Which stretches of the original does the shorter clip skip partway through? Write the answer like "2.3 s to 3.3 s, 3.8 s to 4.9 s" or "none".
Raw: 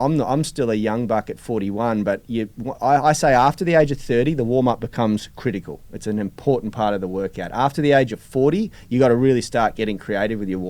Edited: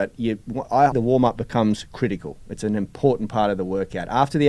3.0 s to 4.4 s